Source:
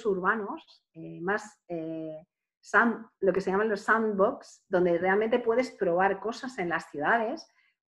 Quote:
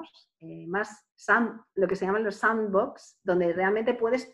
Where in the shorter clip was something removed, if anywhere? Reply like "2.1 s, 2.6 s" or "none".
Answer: 1.1 s